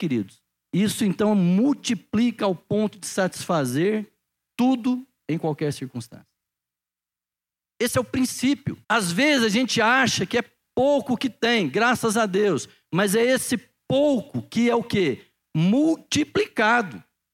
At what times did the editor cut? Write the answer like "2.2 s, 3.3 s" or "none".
8.8 s